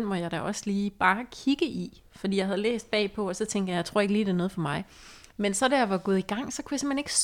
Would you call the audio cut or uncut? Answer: uncut